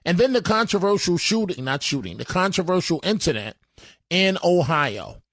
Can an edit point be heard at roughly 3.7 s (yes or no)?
no